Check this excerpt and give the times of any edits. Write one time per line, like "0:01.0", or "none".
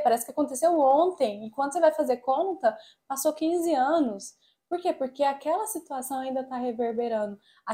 none

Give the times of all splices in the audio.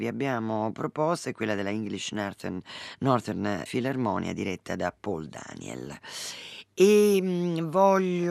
0:03.7

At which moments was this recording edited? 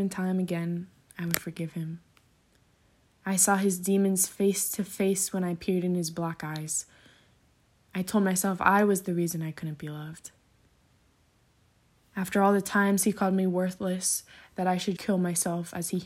0:15.0

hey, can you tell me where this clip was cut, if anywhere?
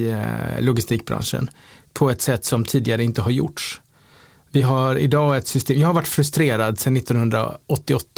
none

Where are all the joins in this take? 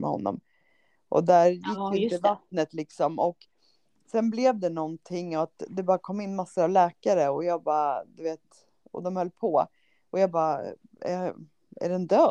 none

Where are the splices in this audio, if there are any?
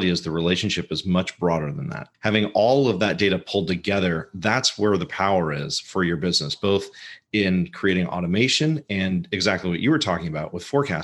0:02.1

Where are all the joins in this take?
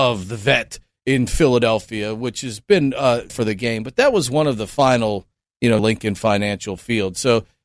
0:03.3
0:05.8

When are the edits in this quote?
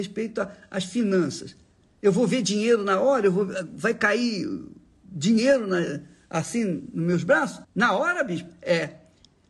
0:07.6

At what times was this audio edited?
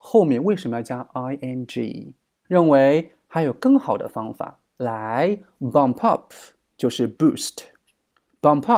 0:02.4

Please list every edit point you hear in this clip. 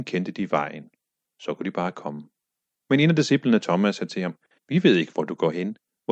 0:04.6

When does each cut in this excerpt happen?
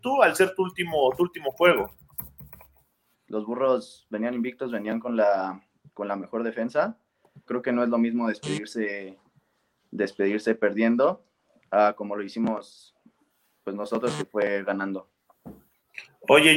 0:03.1
0:07.5

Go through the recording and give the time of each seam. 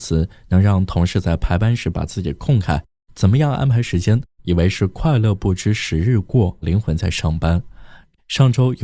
0:04.3
0:06.6

